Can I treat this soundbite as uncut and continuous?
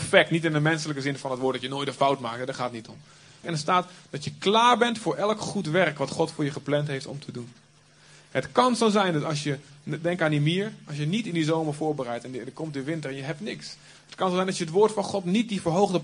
no; 1 cut; at 3.4 s

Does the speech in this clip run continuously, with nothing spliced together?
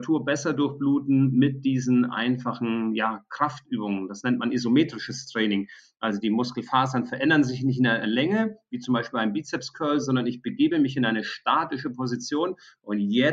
yes; 0 cuts

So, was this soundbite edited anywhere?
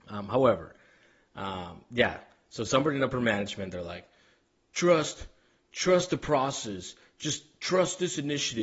no; 0 cuts

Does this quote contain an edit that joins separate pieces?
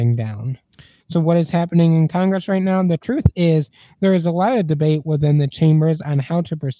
yes; 1 cut; at 1.0 s

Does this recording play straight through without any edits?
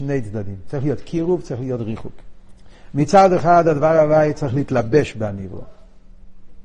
yes; 0 cuts

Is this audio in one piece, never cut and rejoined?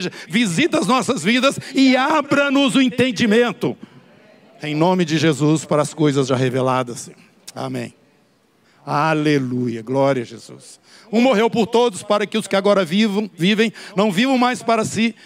no; 1 cut; at 8.6 s

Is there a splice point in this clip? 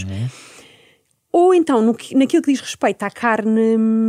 no; 0 cuts

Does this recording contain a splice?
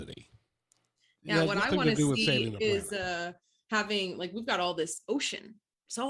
no; 0 cuts

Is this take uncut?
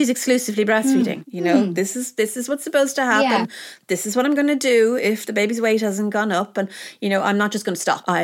no; 1 cut; at 1.2 s

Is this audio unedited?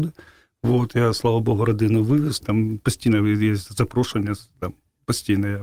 no; 1 cut; at 2.4 s

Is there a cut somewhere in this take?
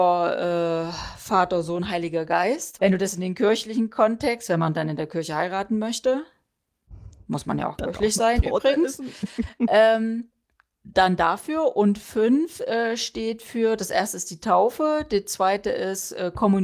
yes; 1 cut; at 2.8 s

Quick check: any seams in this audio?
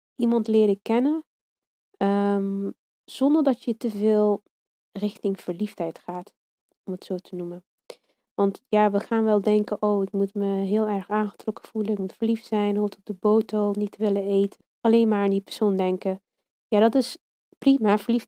yes; 1 cut; at 14.6 s

